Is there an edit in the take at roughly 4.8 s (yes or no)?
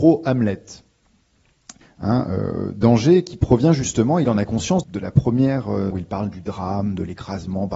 yes